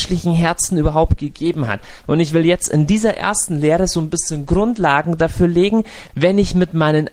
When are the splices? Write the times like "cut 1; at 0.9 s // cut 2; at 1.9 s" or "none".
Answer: cut 1; at 2.0 s // cut 2; at 6.1 s